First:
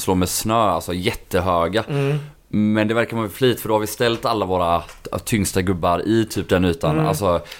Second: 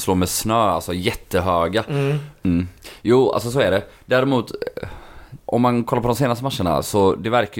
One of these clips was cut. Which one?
second; 2 cuts; at 2.3 s, 5.4 s

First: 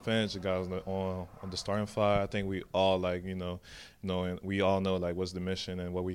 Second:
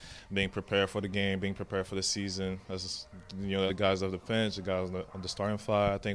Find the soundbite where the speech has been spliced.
second; 2 cuts; at 3.7 s, 5.1 s

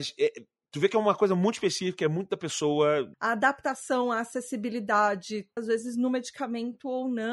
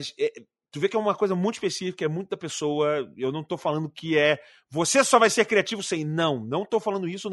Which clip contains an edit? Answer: first; 2 cuts; at 3.1 s, 5.6 s

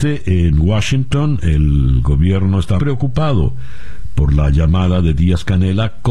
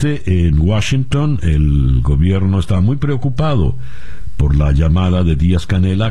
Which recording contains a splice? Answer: first; 1 cut; at 2.8 s

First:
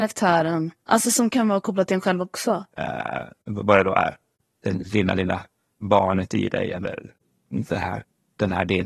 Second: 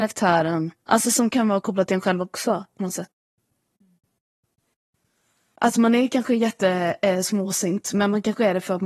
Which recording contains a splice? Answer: first; 1 cut; at 2.7 s

